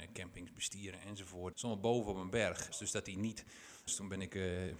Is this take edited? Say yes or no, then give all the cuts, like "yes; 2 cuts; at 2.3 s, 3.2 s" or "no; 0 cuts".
yes; 3 cuts; at 1.5 s, 2.7 s, 3.9 s